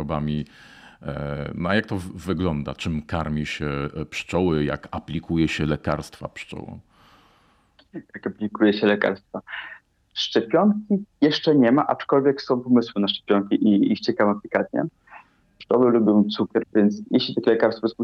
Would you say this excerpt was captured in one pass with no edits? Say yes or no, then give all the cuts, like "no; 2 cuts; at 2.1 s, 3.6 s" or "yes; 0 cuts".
no; 2 cuts; at 15.4 s, 16.6 s